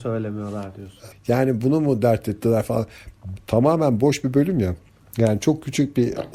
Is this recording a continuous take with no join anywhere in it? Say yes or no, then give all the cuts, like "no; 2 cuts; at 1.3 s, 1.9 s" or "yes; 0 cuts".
no; 2 cuts; at 1.1 s, 3.4 s